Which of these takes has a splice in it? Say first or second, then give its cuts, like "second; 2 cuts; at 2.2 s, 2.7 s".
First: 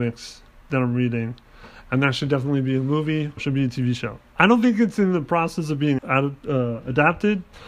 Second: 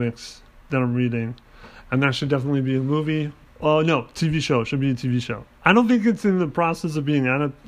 first; 2 cuts; at 3.4 s, 6.0 s